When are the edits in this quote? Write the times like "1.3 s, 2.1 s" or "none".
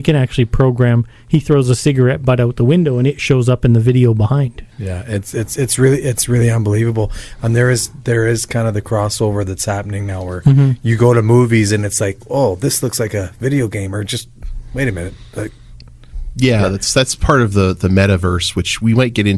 4.7 s